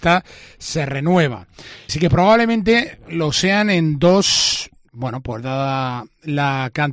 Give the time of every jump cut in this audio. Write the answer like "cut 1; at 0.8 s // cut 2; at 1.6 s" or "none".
cut 1; at 1.9 s // cut 2; at 4.9 s

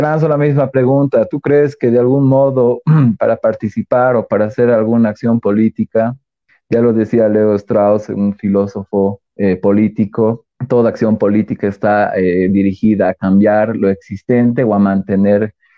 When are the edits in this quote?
cut 1; at 9.3 s // cut 2; at 10.5 s

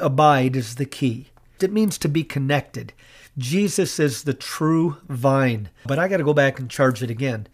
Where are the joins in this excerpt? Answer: cut 1; at 1.6 s // cut 2; at 5.9 s

